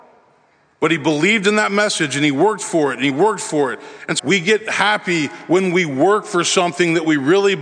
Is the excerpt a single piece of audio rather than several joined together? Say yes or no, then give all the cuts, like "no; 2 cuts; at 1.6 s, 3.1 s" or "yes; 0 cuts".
no; 1 cut; at 4.2 s